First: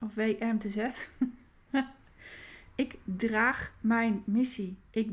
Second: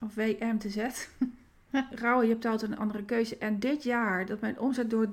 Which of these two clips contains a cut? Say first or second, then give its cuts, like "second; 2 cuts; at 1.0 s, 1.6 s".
second; 1 cut; at 1.9 s